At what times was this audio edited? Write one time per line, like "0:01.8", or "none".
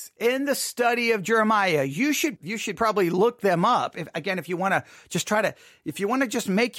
0:02.4